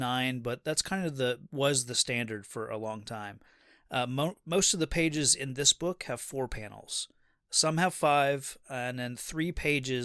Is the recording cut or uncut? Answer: uncut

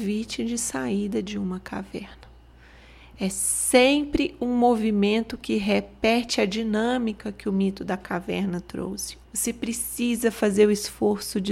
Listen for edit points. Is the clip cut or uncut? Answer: cut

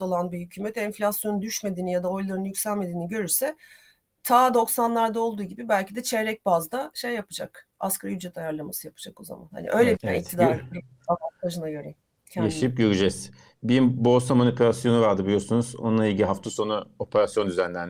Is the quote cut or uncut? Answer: cut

